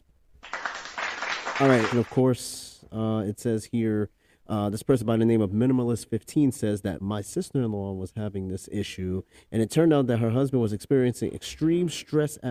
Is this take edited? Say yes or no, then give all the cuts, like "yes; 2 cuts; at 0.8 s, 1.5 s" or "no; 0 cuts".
yes; 2 cuts; at 1.9 s, 7.0 s